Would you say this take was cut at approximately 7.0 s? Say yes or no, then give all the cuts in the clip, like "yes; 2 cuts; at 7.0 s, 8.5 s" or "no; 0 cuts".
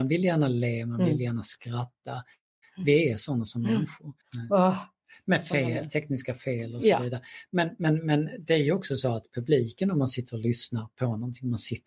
no; 1 cut; at 4.2 s